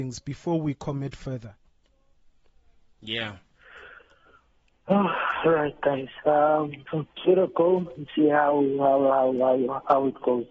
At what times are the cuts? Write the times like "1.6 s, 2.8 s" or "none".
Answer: none